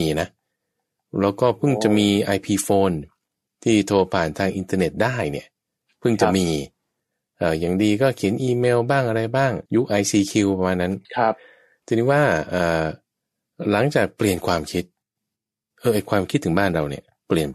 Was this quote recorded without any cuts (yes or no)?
no